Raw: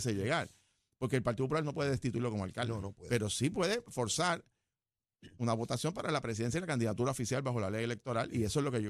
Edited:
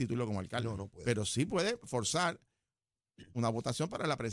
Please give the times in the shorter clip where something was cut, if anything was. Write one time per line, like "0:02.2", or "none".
none